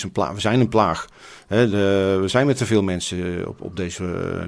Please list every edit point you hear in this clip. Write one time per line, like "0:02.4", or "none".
none